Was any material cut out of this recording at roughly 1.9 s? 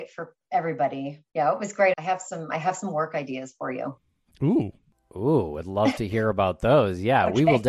yes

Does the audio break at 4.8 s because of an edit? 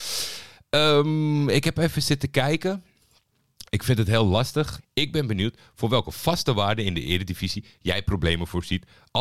yes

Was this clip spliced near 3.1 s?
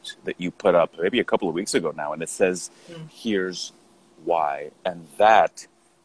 yes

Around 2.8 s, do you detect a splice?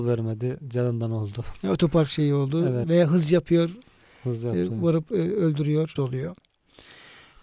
yes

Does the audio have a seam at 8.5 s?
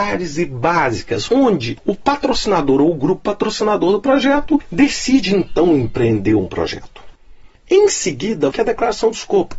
yes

